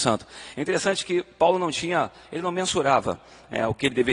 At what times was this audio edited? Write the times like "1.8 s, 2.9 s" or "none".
none